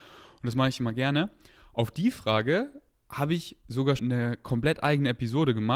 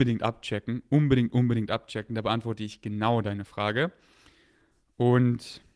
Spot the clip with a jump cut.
first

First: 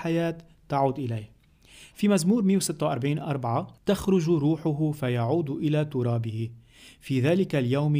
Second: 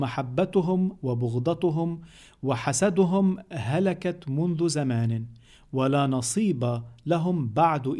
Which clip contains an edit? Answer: first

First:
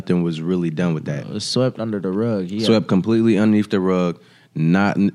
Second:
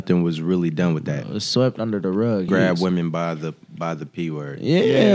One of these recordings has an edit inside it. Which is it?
second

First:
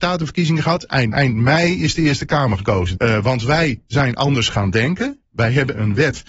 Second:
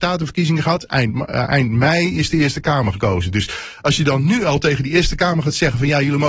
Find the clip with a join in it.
first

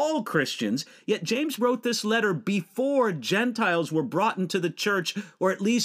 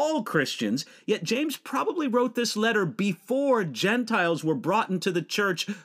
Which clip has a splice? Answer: first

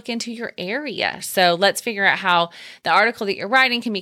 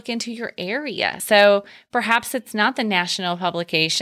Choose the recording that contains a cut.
first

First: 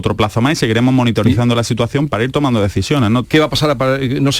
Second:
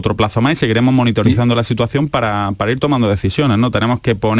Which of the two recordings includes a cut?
first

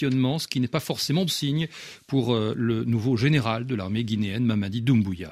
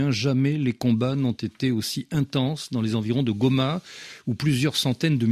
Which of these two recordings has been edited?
first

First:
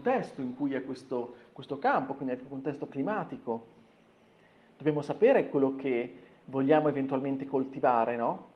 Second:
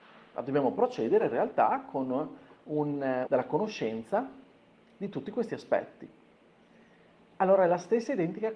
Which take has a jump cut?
second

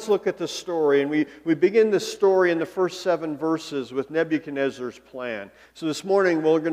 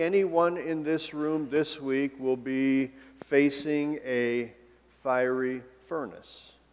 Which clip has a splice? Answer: first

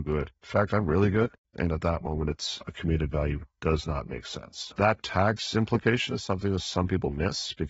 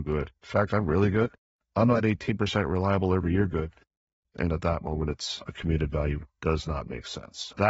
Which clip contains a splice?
first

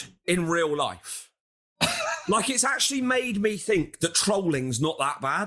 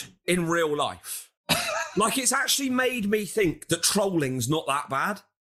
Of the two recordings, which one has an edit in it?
second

